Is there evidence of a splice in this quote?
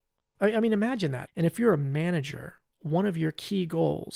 yes; 2 cuts; at 1.3 s, 2.7 s

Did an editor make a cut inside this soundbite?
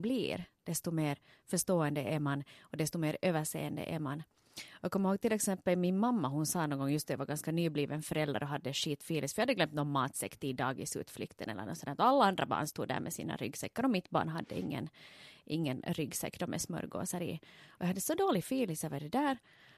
no; 0 cuts

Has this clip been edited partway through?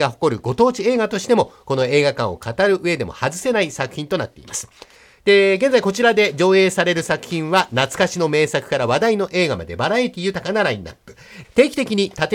yes; 1 cut; at 11.4 s

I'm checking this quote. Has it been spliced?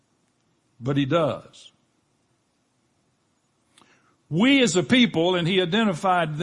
no; 0 cuts

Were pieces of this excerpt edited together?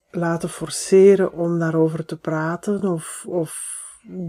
no; 0 cuts

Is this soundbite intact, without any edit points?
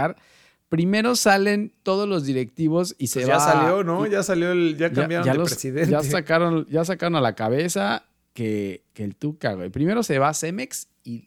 yes; 0 cuts

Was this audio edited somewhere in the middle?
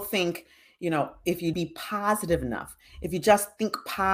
yes; 1 cut; at 1.5 s

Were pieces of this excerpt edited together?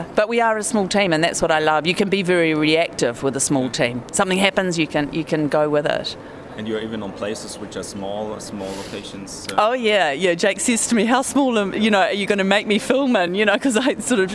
no; 0 cuts

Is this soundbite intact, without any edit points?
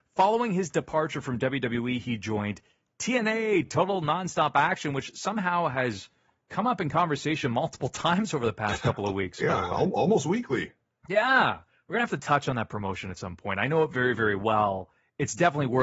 yes; 0 cuts

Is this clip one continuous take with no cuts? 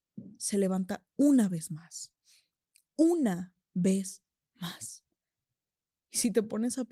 yes; 0 cuts

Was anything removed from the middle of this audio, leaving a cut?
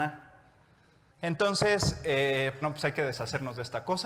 yes; 2 cuts; at 1.1 s, 2.6 s

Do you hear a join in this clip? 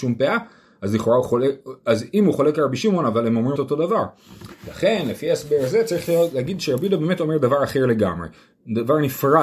yes; 1 cut; at 3.6 s

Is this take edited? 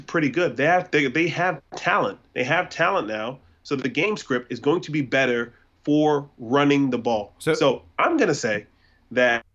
yes; 1 cut; at 2.3 s

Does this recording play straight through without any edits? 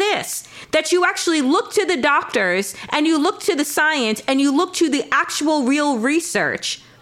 yes; 0 cuts

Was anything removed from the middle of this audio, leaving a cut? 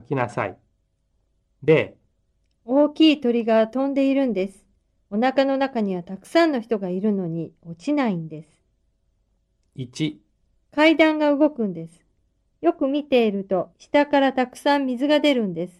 yes; 2 cuts; at 12.5 s, 13.7 s

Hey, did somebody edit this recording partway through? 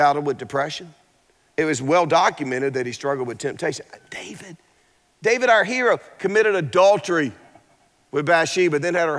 no; 0 cuts

